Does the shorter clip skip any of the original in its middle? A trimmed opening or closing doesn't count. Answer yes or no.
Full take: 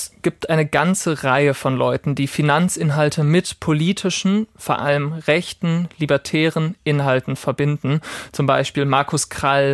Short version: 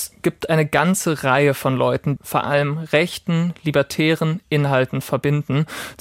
yes